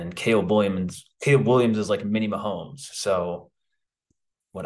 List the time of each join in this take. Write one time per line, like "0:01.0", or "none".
none

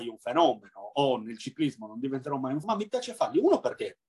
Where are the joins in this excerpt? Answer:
0:02.6

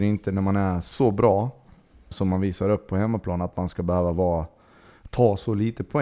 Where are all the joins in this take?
0:02.1

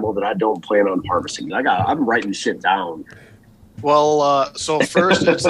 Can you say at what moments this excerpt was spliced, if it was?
0:01.5

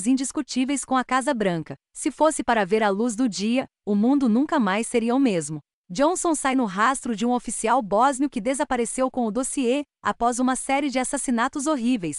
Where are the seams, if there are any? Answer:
none

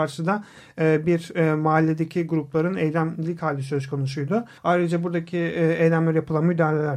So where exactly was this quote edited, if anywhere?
0:04.6

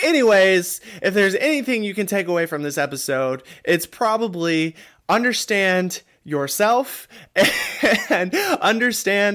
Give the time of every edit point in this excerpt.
none

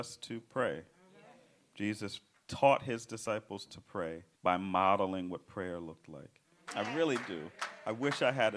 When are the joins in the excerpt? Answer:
0:04.3
0:06.7

